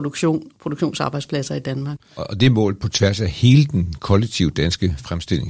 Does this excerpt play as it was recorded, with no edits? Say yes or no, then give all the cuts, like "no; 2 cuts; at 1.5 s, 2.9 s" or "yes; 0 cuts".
yes; 0 cuts